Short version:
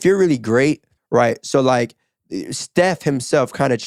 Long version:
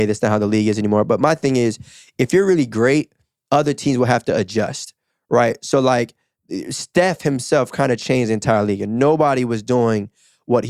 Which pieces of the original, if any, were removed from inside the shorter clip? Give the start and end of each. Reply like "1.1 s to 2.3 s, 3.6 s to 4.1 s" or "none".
3.3 s to 5.2 s